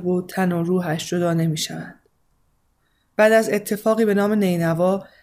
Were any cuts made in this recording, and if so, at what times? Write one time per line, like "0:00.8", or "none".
none